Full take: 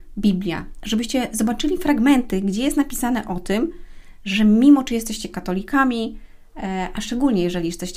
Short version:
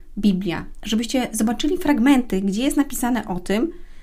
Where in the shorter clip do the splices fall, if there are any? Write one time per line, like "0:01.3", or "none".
none